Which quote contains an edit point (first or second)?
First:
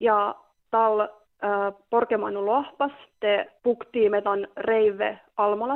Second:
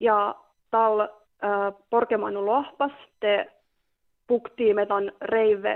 first